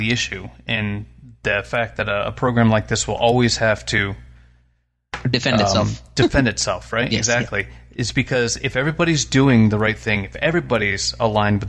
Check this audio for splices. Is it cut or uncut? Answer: uncut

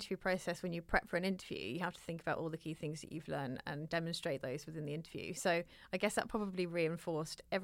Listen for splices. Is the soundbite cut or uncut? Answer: uncut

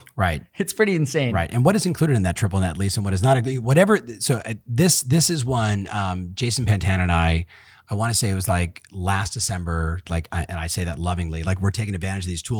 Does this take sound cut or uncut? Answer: cut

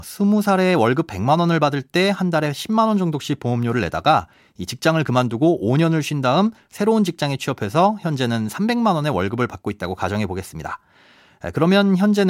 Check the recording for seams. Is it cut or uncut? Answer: uncut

